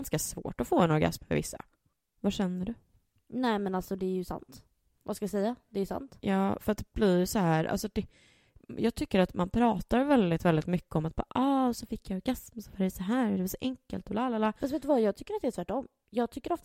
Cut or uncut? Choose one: uncut